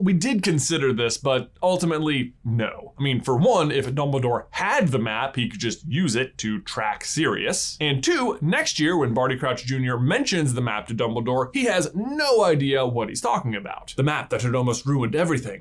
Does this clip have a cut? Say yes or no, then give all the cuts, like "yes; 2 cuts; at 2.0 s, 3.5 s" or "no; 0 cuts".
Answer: no; 0 cuts